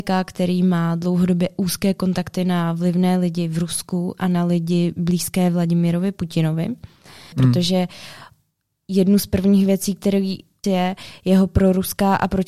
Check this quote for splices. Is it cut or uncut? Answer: cut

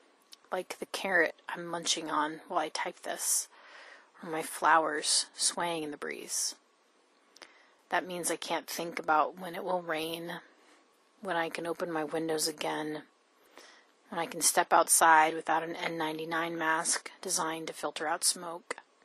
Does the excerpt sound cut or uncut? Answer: cut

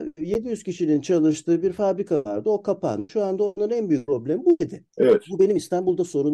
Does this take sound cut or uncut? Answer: cut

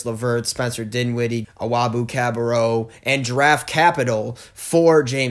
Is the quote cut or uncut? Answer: cut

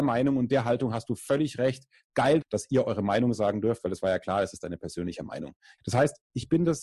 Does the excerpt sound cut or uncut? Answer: cut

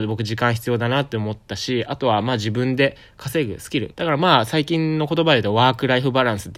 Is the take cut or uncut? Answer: cut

